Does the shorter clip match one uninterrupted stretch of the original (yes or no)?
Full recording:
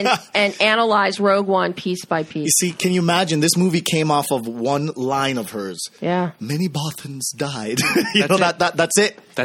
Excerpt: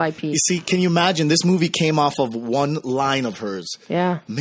yes